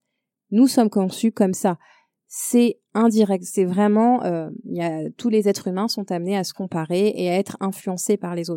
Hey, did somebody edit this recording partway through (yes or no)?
no